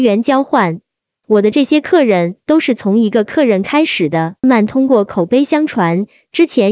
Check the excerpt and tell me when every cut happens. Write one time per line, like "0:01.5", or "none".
0:04.4